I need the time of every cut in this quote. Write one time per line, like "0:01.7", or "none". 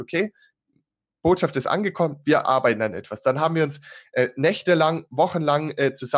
none